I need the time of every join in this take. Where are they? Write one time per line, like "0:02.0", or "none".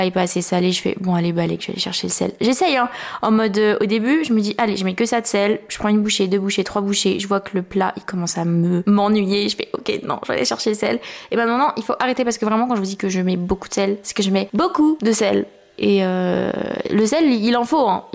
none